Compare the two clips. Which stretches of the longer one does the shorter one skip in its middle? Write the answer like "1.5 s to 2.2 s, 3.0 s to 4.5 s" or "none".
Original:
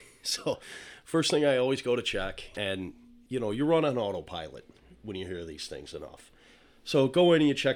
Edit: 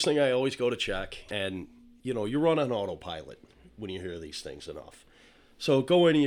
none

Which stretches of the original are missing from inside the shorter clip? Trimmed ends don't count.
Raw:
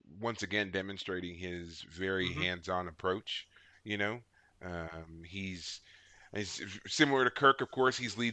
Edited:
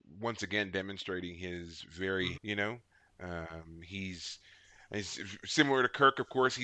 2.3 s to 3.8 s

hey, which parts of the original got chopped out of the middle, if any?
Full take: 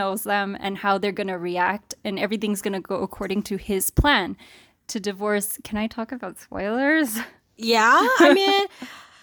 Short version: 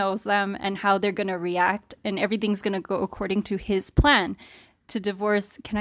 none

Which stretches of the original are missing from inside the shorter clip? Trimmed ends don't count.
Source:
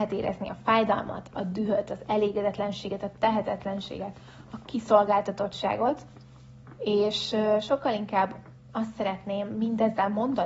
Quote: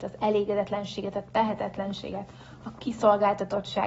none

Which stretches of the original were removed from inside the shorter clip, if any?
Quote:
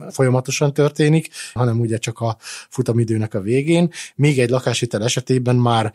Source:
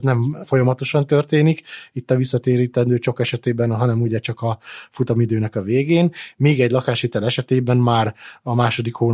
1.9 s to 3.8 s

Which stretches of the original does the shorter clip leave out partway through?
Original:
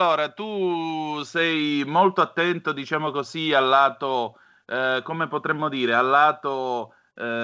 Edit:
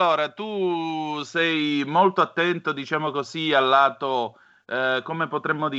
none

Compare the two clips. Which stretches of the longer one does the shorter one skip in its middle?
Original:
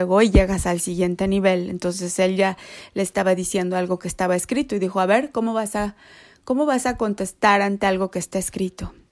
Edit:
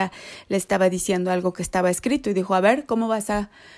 none

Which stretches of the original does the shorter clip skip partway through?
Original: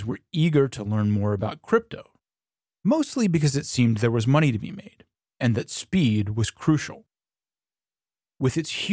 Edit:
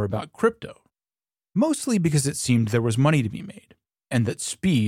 none

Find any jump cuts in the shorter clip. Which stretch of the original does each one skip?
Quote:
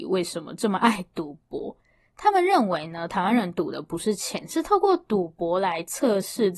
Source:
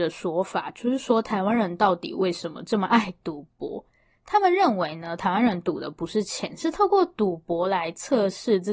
none

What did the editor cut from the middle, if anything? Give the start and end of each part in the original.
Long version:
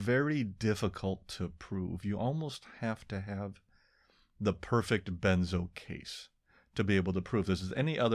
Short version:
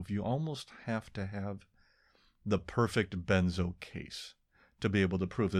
none

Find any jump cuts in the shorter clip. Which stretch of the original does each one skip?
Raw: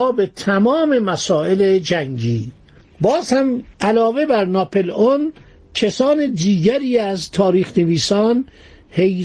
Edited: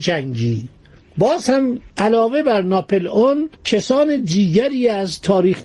5.4 s to 5.7 s

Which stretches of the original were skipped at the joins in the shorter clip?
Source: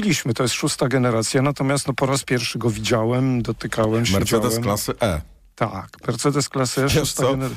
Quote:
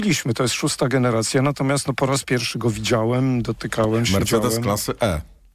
none

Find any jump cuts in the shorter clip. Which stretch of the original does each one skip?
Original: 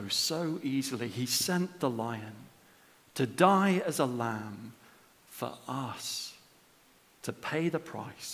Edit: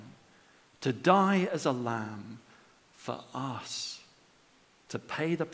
none

